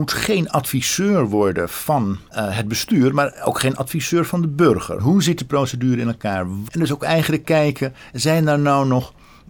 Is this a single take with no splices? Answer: no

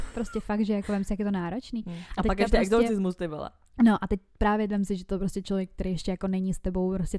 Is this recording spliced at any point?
no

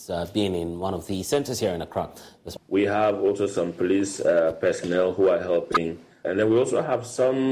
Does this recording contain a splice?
yes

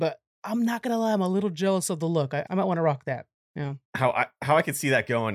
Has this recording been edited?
yes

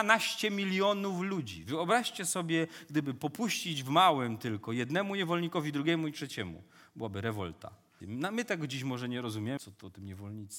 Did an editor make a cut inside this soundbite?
yes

